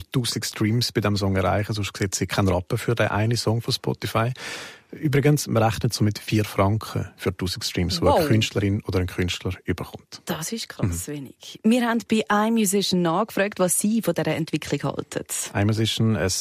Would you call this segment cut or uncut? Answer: uncut